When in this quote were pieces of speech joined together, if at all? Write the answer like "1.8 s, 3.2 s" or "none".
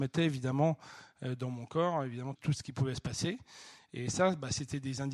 2.4 s

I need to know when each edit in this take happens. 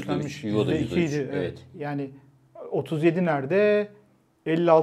1.7 s

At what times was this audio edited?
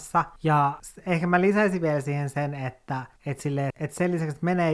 3.7 s

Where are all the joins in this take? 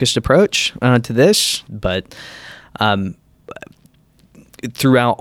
1.7 s

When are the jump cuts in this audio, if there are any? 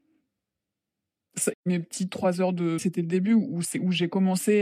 1.5 s, 2.8 s

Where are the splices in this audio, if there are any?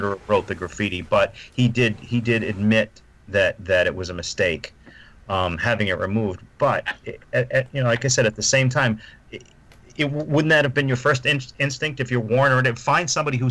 none

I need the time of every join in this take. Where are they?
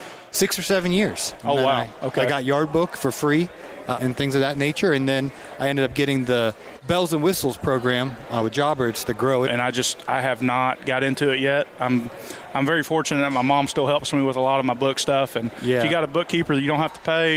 4.0 s, 9.5 s

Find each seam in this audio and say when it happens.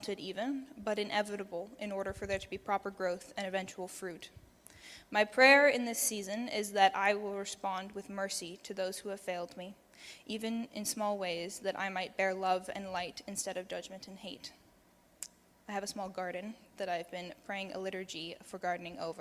none

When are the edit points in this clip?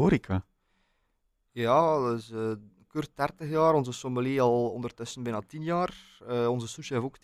none

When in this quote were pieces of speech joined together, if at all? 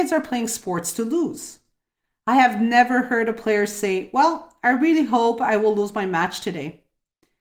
none

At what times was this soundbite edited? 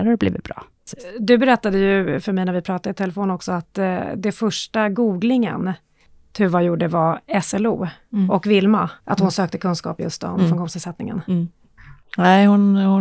9.0 s

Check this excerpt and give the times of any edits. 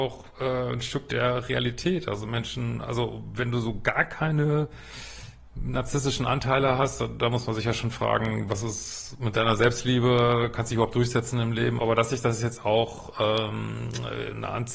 11.8 s

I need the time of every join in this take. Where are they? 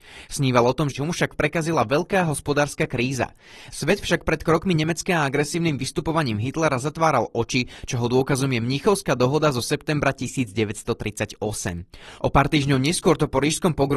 0.9 s, 3.7 s

